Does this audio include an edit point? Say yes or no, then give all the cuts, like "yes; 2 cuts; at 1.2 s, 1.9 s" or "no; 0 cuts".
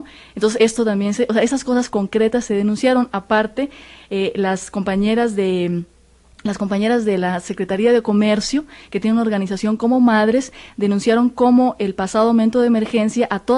no; 0 cuts